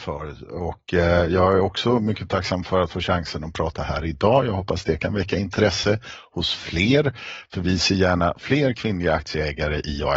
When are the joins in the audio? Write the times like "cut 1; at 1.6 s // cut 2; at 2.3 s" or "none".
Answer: none